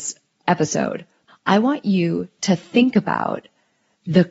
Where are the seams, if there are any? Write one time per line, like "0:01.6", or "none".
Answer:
0:01.3